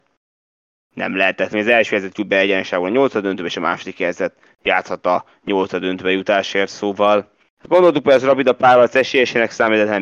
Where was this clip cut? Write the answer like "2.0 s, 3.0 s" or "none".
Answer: 7.5 s